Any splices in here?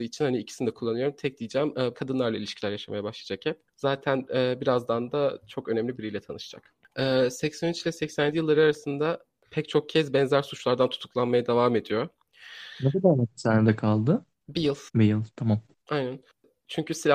yes; 2 cuts; at 1.9 s, 14.9 s

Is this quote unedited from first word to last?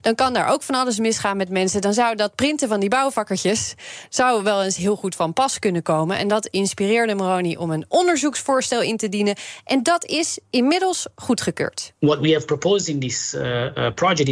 yes; 0 cuts

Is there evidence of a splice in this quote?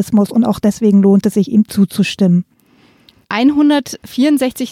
no; 0 cuts

